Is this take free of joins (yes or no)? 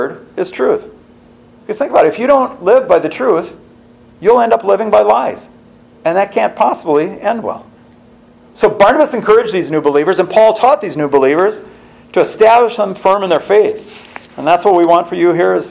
yes